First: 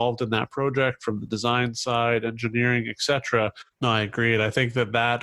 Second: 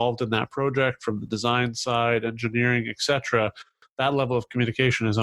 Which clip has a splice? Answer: first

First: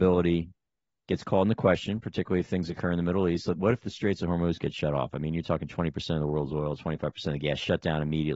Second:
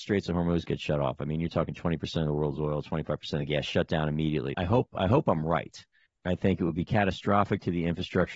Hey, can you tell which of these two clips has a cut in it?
second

